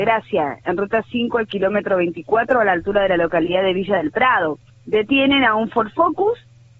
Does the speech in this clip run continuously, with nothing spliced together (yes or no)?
no